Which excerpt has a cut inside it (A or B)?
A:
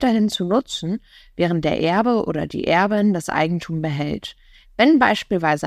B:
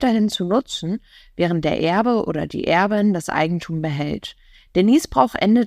A